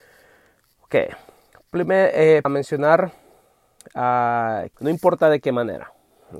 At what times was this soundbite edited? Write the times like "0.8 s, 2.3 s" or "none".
2.4 s, 4.7 s